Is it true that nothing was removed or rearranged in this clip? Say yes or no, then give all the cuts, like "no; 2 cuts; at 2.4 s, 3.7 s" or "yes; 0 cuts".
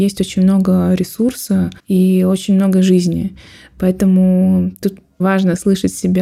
no; 2 cuts; at 1.8 s, 5.2 s